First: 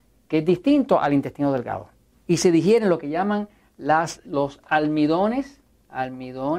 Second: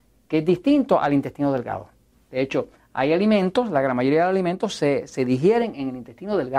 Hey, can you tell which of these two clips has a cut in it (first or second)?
first